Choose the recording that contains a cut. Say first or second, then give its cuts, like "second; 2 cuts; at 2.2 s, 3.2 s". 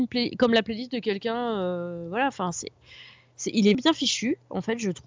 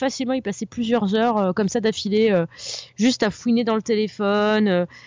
first; 1 cut; at 3.7 s